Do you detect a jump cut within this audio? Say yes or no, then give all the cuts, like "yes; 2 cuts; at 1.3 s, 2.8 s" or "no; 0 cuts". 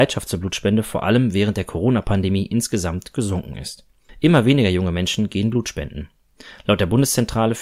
no; 0 cuts